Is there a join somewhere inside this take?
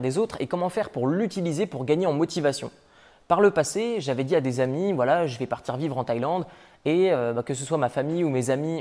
no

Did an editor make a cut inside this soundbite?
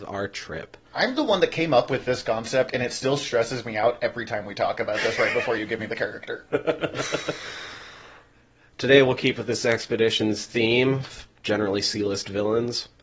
no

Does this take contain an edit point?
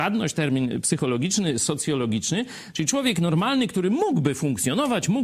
no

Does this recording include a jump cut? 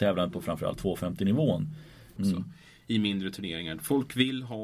yes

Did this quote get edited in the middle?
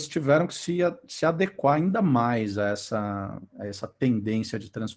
no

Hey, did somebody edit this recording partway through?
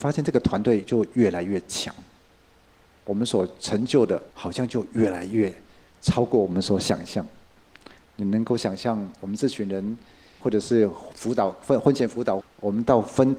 yes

